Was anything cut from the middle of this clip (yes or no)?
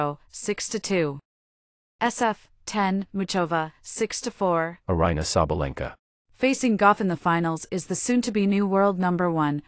yes